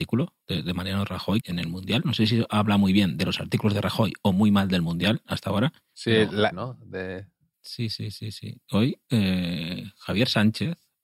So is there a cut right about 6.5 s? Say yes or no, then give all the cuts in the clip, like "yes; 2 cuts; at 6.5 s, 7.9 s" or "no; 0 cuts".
yes; 2 cuts; at 1.4 s, 6.5 s